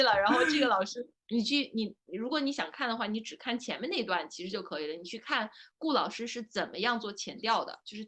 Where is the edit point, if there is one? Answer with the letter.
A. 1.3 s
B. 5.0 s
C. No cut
A